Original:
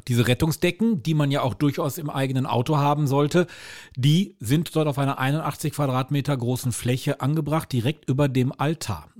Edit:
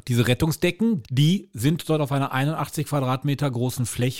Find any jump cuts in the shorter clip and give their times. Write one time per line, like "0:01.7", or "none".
0:01.0

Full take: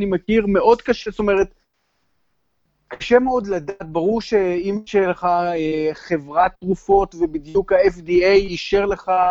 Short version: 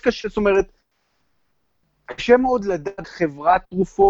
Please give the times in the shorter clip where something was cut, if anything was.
0:03.0

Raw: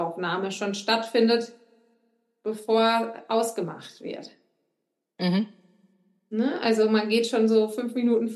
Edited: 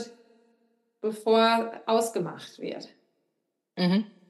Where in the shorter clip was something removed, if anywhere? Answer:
none

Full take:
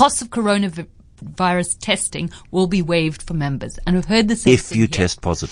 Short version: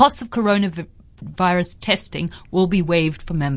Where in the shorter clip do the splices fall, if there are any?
none

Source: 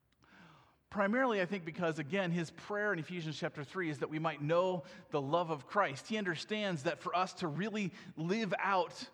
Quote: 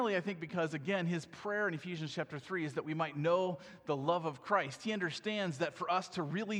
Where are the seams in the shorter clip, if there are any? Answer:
none

